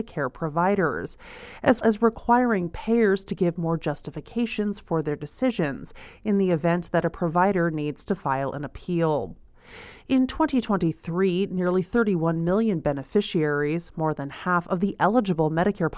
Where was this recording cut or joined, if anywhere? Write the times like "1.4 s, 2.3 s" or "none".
1.8 s

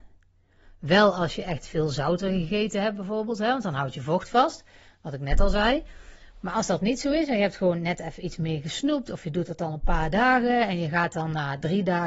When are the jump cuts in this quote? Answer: none

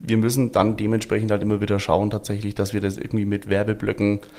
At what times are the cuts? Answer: none

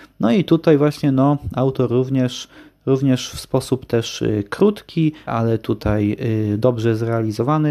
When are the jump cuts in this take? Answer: 5.3 s

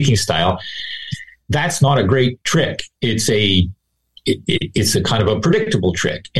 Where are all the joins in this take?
none

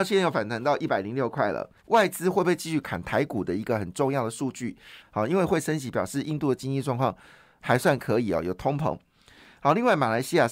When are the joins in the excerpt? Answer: 1.8 s, 5.0 s

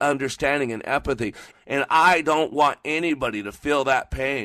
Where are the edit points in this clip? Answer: 1.5 s

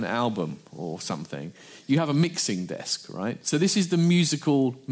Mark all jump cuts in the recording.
3.4 s

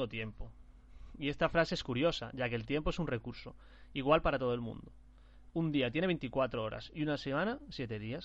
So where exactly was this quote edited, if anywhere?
none

